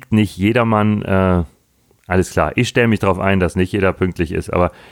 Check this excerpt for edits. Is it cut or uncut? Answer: uncut